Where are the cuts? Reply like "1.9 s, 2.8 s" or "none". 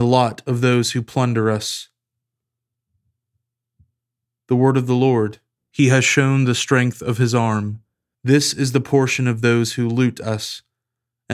5.6 s, 8.1 s